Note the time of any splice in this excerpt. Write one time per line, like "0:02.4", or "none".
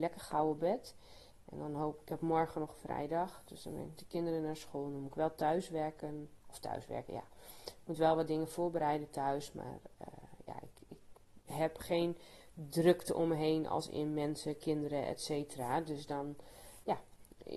none